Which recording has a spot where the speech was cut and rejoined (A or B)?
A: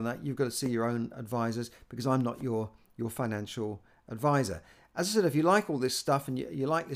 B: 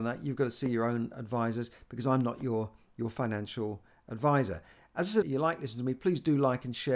B